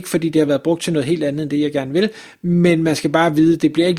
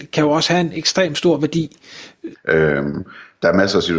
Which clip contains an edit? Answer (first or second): second